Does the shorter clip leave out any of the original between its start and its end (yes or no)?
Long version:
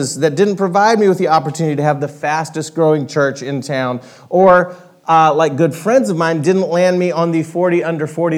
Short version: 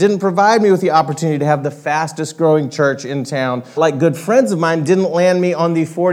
yes